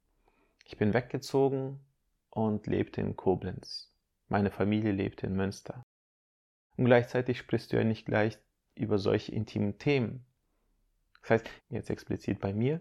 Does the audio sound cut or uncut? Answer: cut